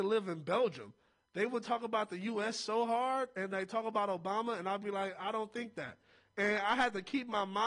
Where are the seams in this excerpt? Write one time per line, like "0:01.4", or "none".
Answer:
none